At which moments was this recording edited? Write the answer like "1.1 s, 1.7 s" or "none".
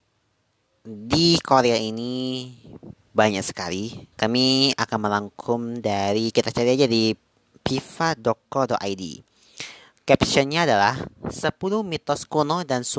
4.1 s